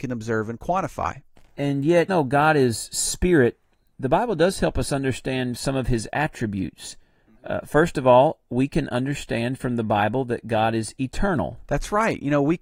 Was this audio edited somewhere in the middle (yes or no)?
yes